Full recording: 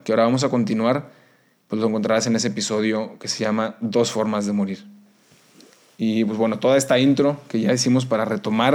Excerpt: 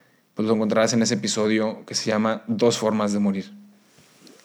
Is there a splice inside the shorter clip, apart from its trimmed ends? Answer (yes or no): no